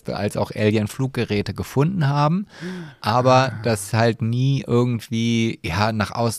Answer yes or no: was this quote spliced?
no